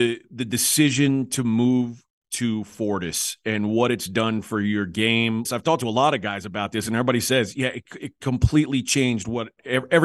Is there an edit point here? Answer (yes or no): yes